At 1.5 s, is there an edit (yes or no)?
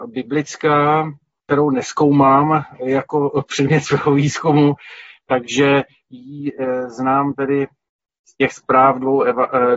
yes